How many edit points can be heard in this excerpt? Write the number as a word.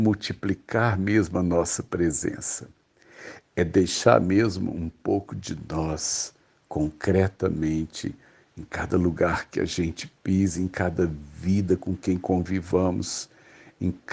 zero